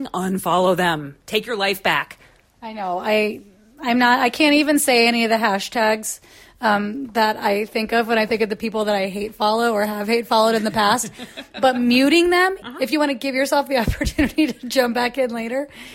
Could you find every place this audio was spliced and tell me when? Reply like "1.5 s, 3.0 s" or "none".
12.6 s